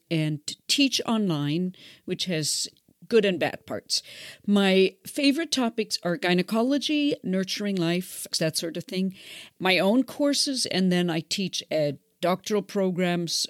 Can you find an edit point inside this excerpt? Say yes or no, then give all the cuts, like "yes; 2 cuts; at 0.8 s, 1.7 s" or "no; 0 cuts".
yes; 3 cuts; at 7.2 s, 8.3 s, 9.6 s